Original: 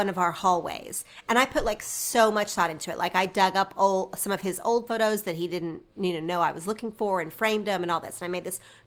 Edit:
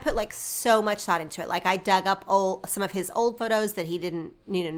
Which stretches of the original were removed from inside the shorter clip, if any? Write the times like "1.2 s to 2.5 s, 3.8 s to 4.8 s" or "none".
none